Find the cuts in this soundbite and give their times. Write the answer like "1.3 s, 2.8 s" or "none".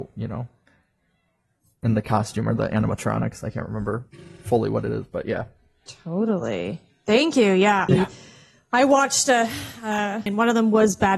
7.9 s, 10.3 s